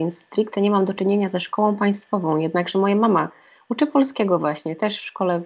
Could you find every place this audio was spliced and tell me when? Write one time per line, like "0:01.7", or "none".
none